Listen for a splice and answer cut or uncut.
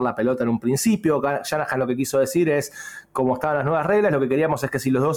uncut